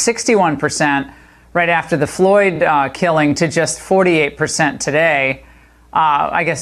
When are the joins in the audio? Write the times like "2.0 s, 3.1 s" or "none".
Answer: none